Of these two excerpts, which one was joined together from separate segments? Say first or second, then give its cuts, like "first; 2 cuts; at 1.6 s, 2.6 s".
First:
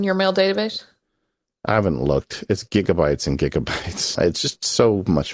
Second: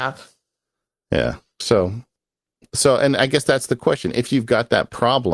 first; 1 cut; at 4.1 s